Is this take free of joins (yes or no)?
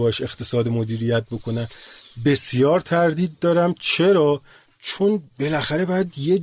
yes